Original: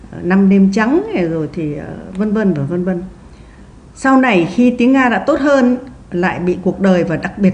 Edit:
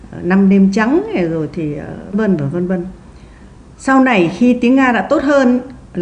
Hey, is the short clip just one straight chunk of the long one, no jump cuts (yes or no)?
no